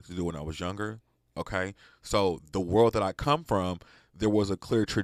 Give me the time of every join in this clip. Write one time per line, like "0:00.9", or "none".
none